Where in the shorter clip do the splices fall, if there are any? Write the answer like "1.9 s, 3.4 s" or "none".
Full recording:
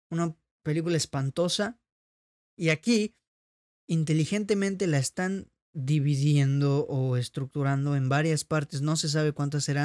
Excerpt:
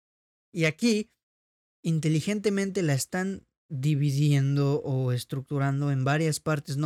none

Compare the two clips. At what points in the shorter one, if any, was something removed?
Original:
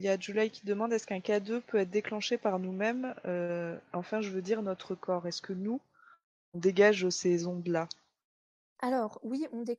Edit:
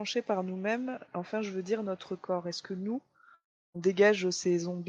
1.1 s

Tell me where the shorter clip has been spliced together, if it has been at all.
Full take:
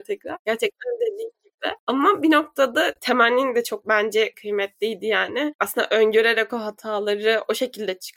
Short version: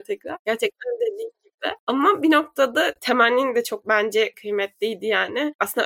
none

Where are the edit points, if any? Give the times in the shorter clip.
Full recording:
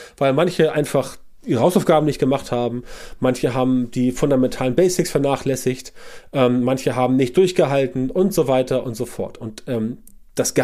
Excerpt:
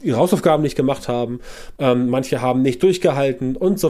1.8 s

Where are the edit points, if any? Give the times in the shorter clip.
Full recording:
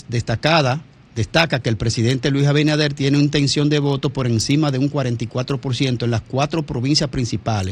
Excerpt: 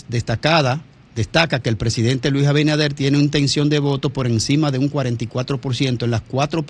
none

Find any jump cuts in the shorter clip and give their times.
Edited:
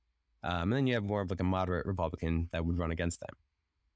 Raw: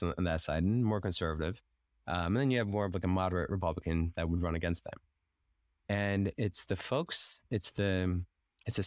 none

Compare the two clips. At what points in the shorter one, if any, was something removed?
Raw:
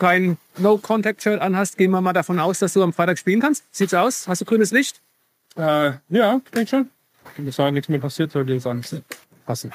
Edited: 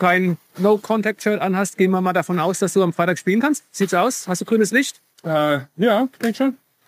5.1 s

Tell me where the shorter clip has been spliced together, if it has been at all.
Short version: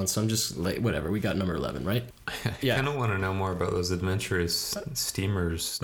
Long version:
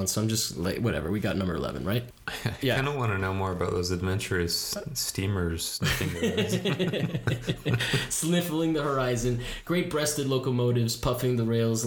none

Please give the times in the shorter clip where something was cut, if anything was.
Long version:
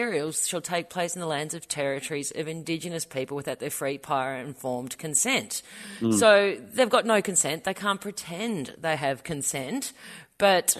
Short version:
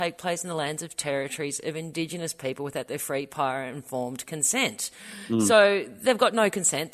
none

